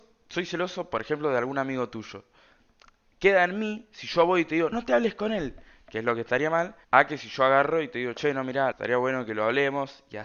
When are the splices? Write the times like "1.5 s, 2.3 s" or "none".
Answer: 4.7 s, 6.8 s, 8.7 s